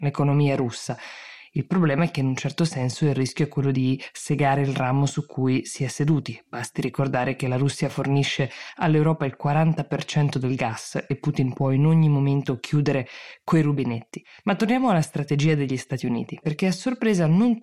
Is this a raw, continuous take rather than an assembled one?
no; 1 cut; at 16.4 s

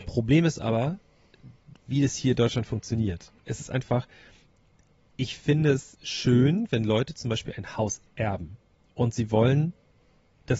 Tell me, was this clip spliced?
no; 0 cuts

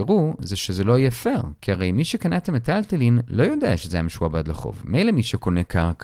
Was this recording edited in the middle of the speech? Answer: no; 0 cuts

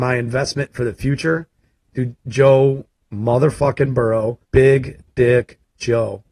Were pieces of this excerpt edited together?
yes; 2 cuts; at 1.8 s, 4.4 s

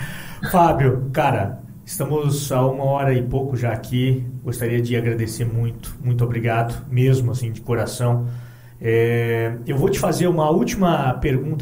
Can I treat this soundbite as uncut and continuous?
yes; 0 cuts

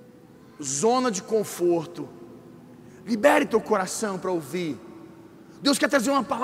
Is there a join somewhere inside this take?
no; 0 cuts

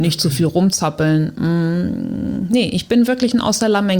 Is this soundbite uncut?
yes; 0 cuts

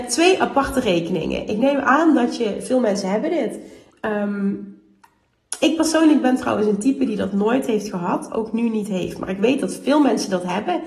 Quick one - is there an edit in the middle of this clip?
no; 0 cuts

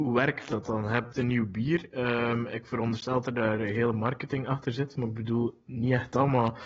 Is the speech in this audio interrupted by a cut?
no; 0 cuts

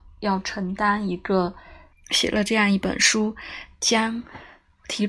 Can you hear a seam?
yes; 1 cut; at 1.9 s

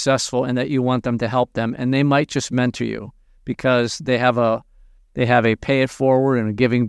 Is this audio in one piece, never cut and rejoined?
yes; 0 cuts

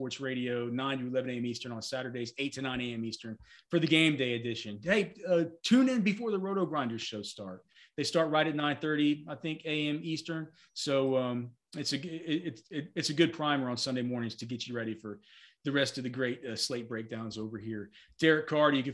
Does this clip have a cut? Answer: no; 0 cuts

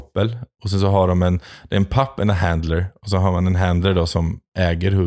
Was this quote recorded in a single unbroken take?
yes; 0 cuts

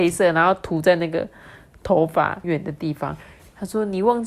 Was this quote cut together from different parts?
yes; 1 cut; at 2.4 s

